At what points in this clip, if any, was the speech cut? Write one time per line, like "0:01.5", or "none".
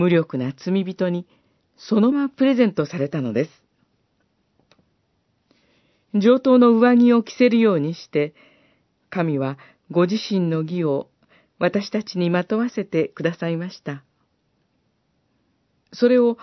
0:02.1